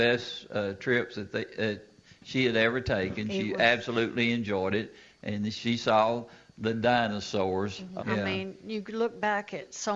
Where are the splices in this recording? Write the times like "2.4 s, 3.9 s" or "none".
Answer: 8.0 s